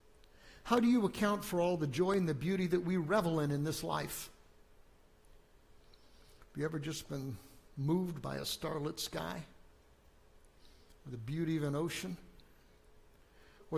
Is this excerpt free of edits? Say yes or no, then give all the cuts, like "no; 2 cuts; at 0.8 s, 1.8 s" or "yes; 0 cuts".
yes; 0 cuts